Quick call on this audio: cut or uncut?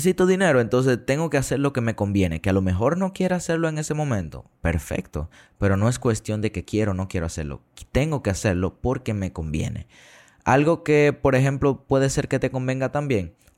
uncut